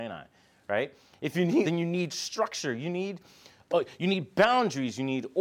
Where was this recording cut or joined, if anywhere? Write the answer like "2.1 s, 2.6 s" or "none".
1.6 s